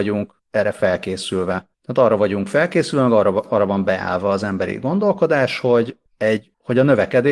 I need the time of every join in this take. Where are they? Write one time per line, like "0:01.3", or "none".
none